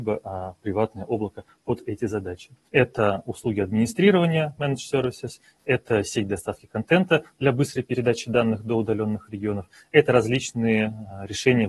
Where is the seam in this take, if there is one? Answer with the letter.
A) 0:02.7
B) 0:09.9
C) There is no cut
A